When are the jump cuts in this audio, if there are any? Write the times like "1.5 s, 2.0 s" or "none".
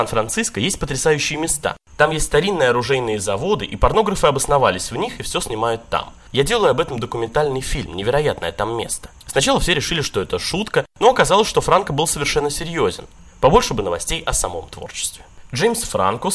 13.3 s